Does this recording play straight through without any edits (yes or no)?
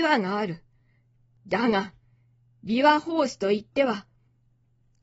yes